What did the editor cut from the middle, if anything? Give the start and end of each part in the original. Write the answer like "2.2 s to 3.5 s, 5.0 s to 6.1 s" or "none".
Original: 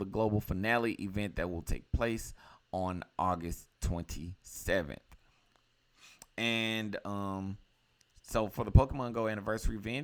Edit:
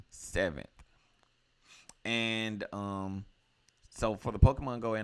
none